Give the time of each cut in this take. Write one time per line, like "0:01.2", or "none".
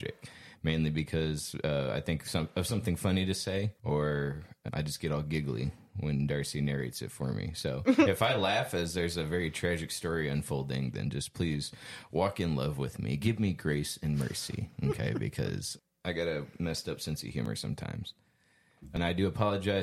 0:03.8